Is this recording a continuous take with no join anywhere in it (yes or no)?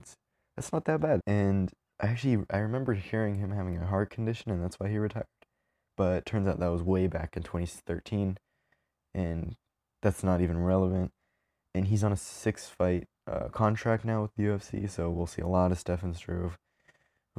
no